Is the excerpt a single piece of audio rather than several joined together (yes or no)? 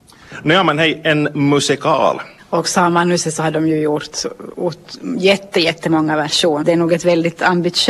no